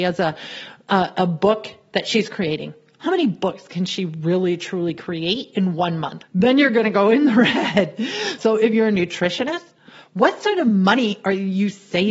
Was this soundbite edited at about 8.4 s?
yes; 2 cuts; at 6.2 s, 8.4 s

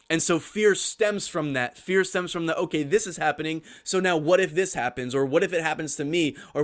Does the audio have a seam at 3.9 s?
no; 0 cuts

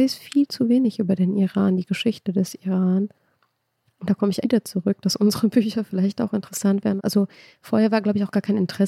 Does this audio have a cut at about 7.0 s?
yes; 2 cuts; at 4.4 s, 7.0 s

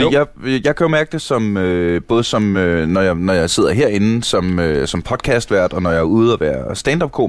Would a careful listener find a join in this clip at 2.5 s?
no; 0 cuts

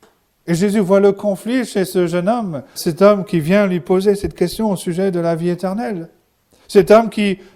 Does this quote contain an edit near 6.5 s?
no; 1 cut; at 2.8 s

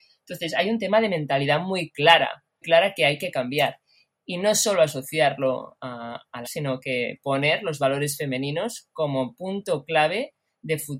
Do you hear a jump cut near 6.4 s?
yes; 2 cuts; at 2.6 s, 6.4 s

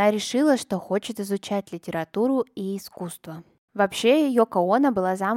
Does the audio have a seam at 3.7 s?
yes; 1 cut; at 3.7 s

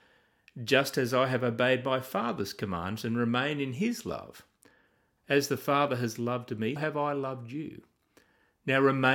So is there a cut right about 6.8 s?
yes; 2 cuts; at 5.2 s, 6.8 s

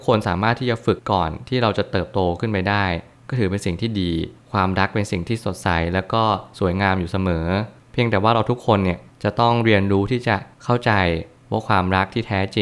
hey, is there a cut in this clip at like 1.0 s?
yes; 1 cut; at 1.0 s

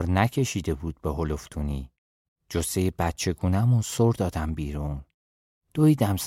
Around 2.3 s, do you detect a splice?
yes; 1 cut; at 2.3 s

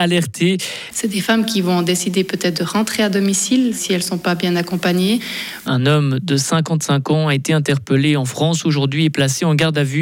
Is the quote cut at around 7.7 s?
no; 2 cuts; at 0.9 s, 5.7 s

